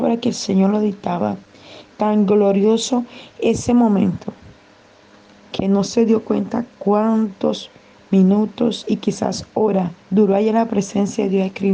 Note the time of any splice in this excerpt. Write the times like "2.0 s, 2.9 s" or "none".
1.9 s, 10.0 s